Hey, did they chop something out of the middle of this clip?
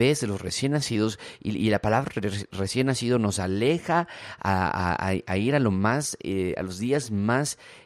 no; 0 cuts

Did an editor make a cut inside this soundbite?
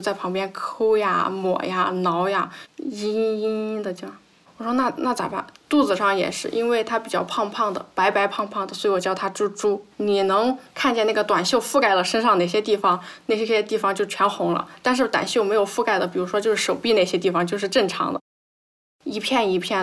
yes; 2 cuts; at 5.5 s, 9.9 s

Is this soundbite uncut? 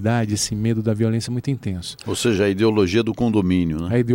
yes; 0 cuts

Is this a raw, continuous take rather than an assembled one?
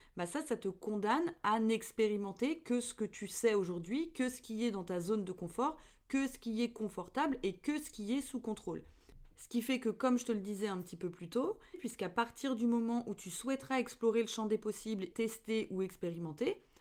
no; 2 cuts; at 11.7 s, 15.1 s

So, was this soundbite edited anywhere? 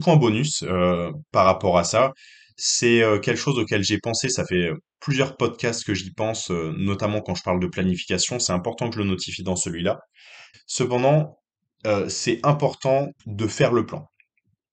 yes; 2 cuts; at 10.5 s, 13.2 s

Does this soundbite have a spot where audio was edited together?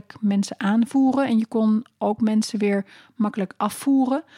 no; 0 cuts

